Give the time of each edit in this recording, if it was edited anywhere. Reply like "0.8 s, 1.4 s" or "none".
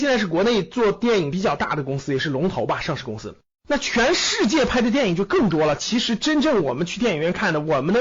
3.5 s